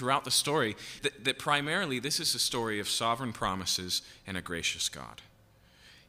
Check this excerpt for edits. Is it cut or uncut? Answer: cut